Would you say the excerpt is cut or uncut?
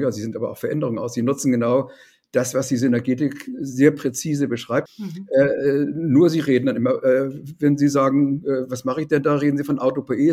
cut